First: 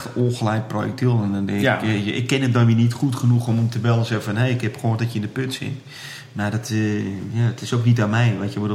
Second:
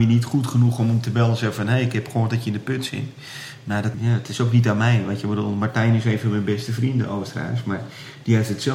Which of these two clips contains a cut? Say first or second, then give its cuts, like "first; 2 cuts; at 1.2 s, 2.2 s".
second; 1 cut; at 3.9 s